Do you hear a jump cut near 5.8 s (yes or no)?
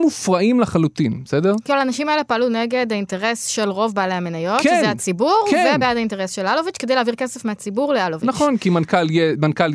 no